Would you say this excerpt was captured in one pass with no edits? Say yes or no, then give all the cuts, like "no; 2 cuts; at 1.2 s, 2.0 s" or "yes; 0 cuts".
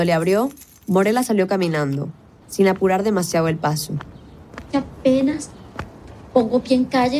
no; 1 cut; at 2.4 s